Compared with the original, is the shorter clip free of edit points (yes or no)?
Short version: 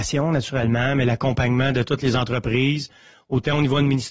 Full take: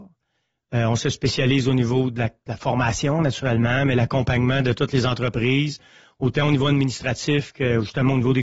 yes